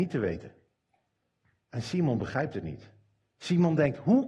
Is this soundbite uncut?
yes; 0 cuts

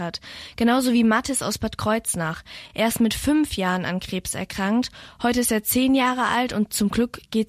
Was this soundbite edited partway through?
no; 0 cuts

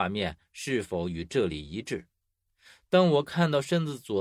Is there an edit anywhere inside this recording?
no; 0 cuts

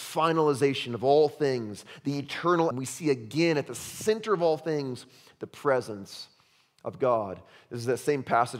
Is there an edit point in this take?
yes; 1 cut; at 2.7 s

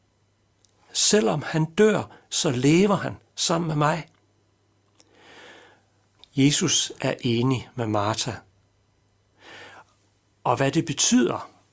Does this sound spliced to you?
yes; 1 cut; at 6.2 s

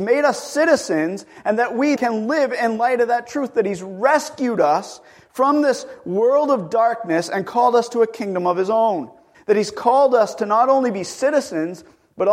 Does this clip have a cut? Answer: yes; 2 cuts; at 2.0 s, 9.3 s

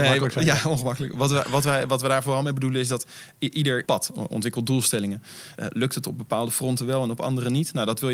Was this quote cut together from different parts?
yes; 2 cuts; at 3.8 s, 5.5 s

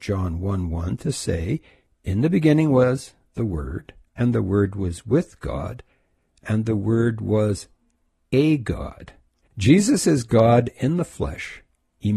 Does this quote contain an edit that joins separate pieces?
yes; 1 cut; at 9.4 s

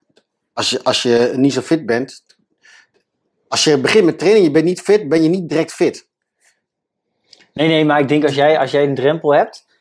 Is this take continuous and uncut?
yes; 0 cuts

